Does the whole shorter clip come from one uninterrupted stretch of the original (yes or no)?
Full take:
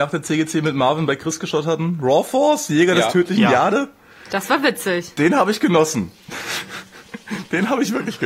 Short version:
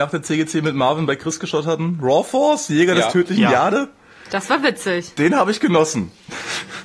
yes